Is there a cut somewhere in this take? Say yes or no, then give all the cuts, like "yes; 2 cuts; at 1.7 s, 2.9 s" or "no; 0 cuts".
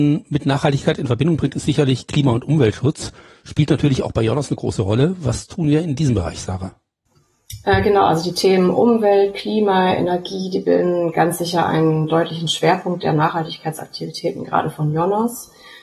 no; 0 cuts